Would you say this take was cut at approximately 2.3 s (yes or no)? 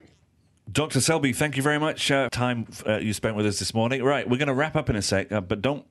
yes